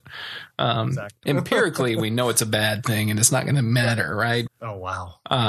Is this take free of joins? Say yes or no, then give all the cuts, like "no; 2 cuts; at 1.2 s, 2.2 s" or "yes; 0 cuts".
no; 2 cuts; at 1.2 s, 4.5 s